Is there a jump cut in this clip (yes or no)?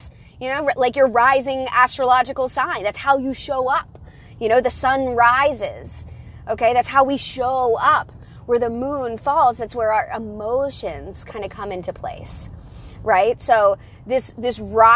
no